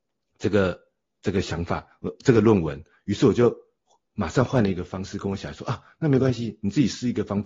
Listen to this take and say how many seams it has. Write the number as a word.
zero